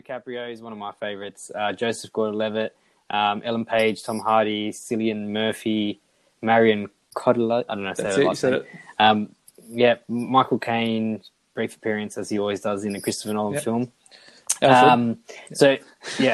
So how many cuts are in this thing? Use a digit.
1